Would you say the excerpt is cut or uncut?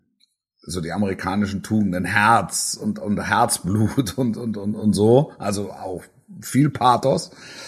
uncut